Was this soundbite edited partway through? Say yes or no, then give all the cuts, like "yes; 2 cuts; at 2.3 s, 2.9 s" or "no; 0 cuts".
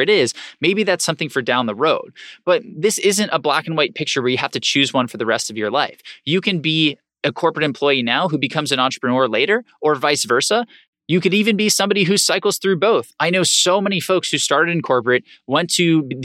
no; 0 cuts